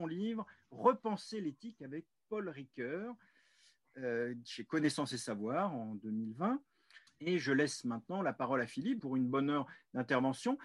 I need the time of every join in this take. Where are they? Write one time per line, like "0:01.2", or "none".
0:07.1
0:09.0